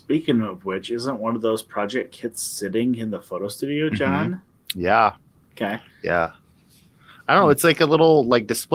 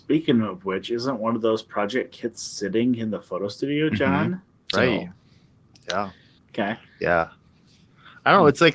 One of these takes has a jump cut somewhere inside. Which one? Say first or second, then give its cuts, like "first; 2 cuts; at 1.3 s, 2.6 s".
second; 2 cuts; at 4.7 s, 6.4 s